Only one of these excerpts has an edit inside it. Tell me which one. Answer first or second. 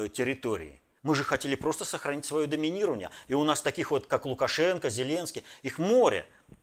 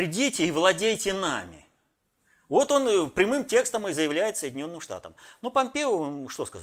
first